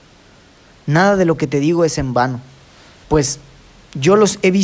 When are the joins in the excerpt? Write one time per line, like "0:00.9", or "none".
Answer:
0:03.0